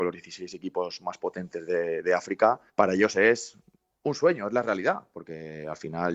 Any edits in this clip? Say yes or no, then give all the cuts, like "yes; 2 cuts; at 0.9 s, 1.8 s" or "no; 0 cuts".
yes; 1 cut; at 2.7 s